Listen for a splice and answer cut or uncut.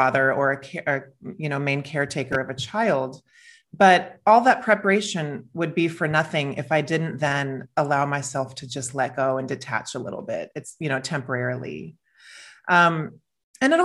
uncut